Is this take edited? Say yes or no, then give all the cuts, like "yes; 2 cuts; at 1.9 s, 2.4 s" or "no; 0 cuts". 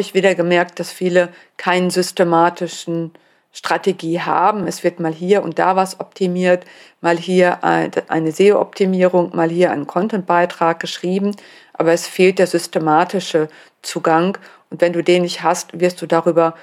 no; 0 cuts